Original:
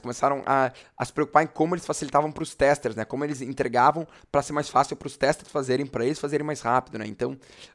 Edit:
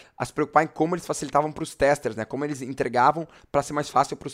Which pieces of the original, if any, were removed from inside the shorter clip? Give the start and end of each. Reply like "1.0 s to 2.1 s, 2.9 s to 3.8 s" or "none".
none